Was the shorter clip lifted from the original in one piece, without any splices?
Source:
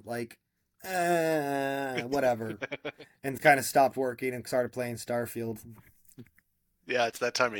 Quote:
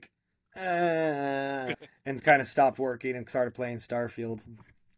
no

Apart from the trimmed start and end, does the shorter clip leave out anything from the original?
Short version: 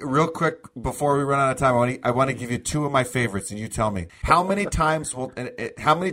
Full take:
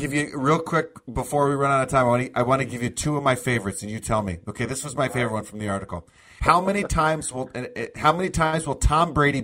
yes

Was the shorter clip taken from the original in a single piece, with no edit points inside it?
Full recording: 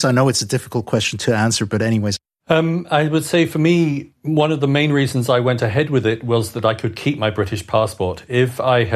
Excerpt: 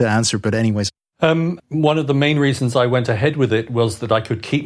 no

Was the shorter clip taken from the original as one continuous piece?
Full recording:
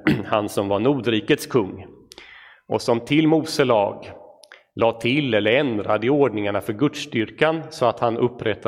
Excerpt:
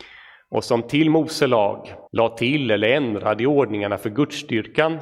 no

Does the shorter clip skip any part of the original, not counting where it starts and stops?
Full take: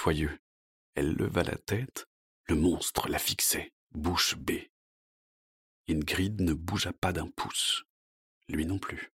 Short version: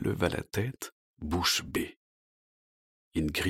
yes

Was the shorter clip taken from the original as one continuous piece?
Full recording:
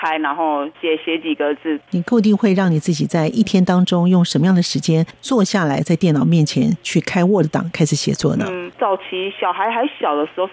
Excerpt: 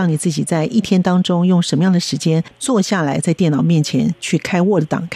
yes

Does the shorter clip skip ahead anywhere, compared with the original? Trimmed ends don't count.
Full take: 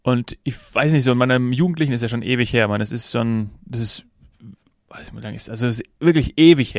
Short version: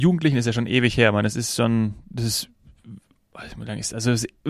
no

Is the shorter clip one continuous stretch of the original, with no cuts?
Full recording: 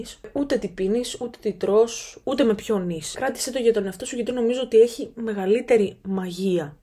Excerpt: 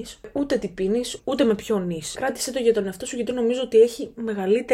no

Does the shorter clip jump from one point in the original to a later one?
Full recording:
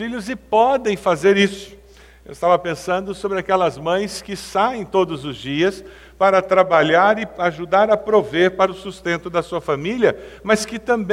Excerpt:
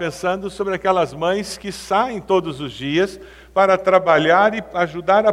no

